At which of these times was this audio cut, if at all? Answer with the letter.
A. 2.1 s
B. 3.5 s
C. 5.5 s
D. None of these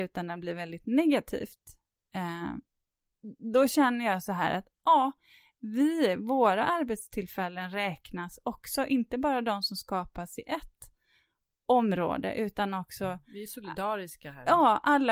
D